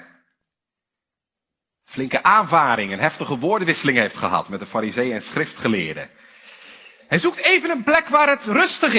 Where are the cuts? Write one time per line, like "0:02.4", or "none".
0:07.1